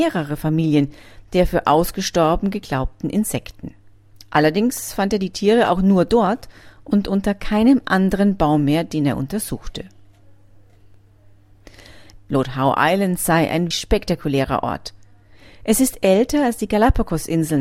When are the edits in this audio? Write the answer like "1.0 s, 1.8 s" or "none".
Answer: 12.2 s, 13.7 s